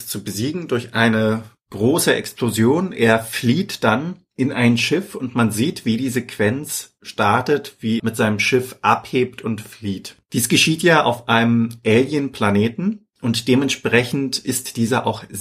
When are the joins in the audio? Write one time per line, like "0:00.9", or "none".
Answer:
0:08.0